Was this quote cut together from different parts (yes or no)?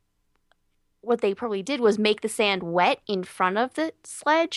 no